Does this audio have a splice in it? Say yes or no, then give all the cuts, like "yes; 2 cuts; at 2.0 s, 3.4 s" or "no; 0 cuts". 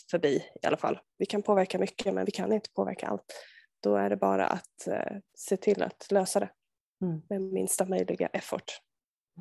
yes; 2 cuts; at 1.1 s, 5.3 s